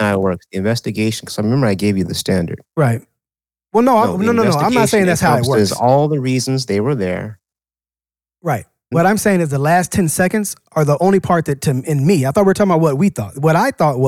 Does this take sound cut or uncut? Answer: cut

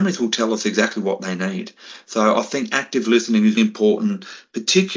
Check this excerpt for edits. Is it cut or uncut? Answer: cut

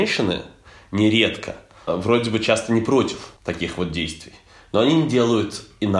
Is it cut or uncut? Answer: cut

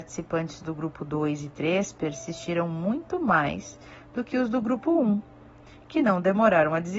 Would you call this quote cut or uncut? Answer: uncut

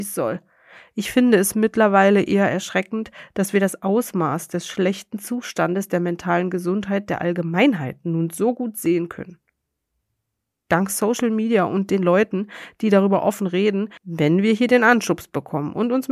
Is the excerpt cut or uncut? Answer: cut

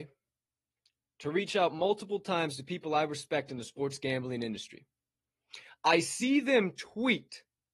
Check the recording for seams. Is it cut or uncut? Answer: uncut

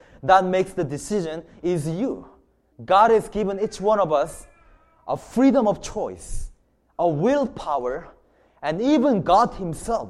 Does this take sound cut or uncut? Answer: cut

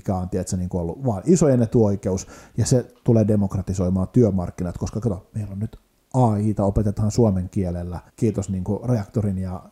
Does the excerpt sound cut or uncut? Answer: cut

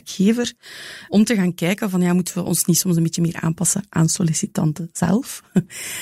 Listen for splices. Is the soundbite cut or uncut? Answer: cut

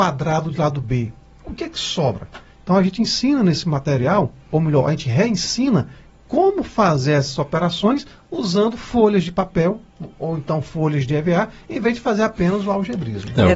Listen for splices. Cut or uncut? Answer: uncut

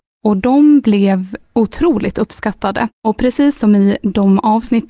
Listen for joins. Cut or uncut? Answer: cut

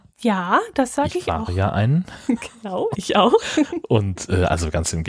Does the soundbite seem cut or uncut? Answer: uncut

